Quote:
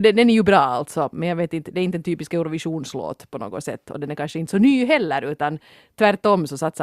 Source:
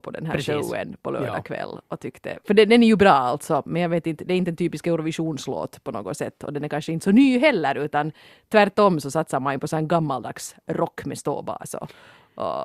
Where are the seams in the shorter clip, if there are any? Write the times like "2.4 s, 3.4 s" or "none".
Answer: none